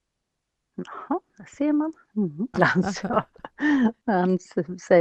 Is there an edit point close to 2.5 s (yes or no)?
yes